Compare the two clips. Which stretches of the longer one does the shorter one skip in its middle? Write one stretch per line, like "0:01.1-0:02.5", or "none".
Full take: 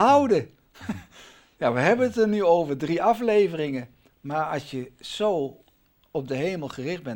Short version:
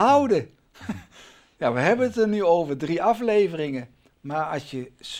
none

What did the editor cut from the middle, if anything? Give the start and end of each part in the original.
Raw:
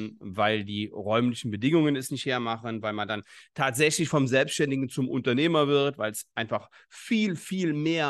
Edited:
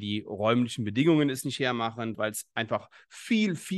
0:02.8-0:05.9

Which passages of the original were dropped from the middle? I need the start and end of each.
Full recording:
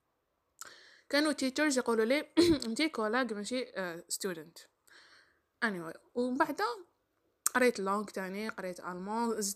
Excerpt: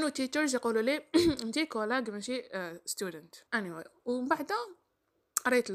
0:04.7-0:05.6

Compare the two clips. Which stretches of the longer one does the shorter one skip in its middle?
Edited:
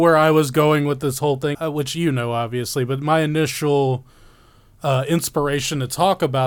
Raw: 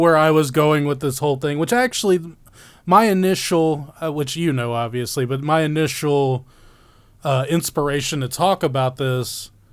0:01.5-0:04.0

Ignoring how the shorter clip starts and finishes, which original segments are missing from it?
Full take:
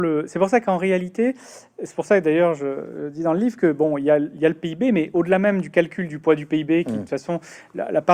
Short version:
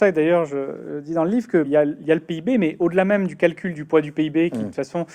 0:03.7-0:04.0

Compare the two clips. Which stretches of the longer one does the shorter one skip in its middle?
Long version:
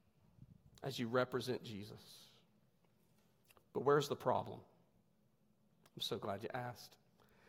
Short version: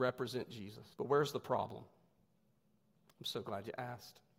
0:02.1-0:03.7

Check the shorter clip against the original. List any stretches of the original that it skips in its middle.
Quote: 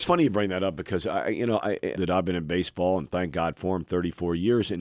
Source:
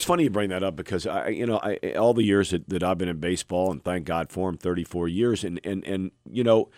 0:01.9-0:02.7

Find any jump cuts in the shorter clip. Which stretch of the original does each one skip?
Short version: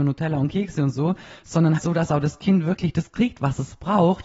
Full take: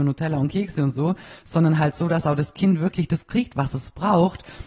0:01.8-0:01.9

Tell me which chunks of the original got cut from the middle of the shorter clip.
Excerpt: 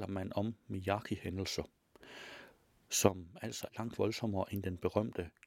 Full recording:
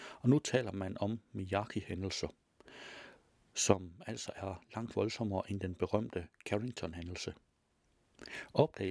0:04.3-0:04.7

